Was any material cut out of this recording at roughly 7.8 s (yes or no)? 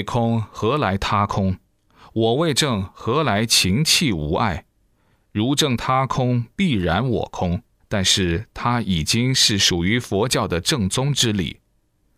yes